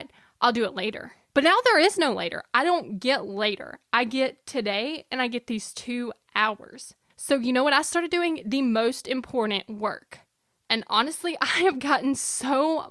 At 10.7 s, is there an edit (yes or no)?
no